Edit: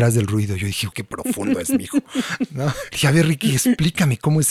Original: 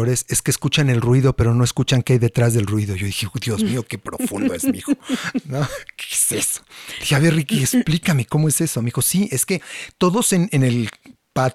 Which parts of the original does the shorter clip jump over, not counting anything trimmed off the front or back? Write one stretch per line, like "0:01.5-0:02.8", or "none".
0:03.3-0:03.9
0:05.9-0:07.0